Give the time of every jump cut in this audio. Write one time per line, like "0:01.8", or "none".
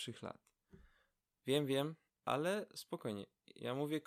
0:02.1